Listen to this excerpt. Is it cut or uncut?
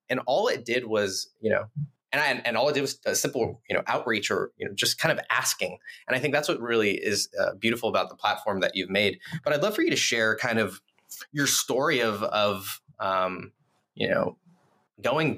uncut